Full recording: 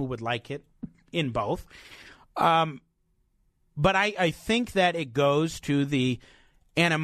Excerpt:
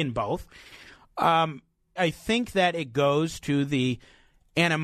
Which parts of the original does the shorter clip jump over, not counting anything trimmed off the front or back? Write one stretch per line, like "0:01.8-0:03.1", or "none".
0:03.1-0:04.2